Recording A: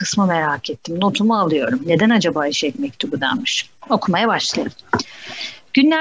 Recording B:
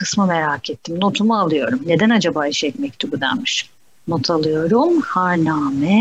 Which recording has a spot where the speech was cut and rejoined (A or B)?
A